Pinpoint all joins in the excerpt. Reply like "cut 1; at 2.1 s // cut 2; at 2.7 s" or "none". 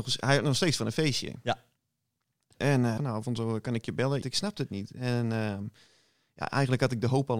cut 1; at 3.0 s // cut 2; at 4.2 s